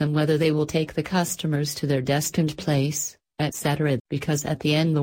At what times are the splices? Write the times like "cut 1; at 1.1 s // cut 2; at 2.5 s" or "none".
cut 1; at 4.0 s